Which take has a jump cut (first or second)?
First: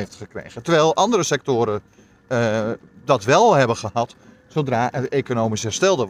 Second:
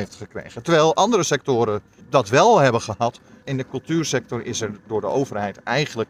second